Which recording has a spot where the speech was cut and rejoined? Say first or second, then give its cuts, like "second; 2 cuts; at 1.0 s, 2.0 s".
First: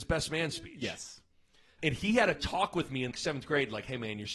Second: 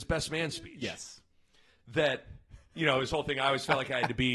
first; 2 cuts; at 1.8 s, 3.1 s